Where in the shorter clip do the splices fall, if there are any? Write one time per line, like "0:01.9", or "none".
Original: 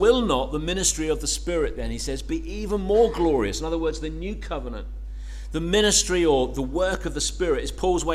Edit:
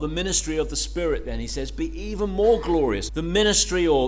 0:03.1